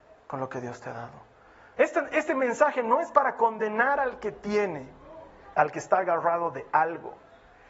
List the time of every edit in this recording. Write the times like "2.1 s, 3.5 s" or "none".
1.8 s, 5.5 s